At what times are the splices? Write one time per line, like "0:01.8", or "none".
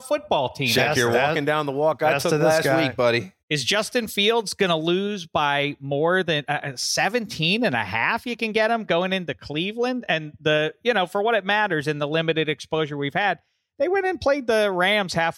0:03.4